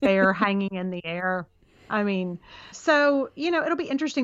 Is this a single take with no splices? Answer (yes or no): no